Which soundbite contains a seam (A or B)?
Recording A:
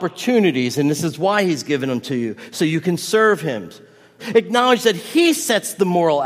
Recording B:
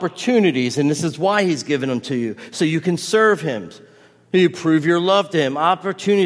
A